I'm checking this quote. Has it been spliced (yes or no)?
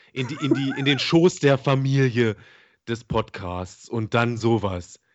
no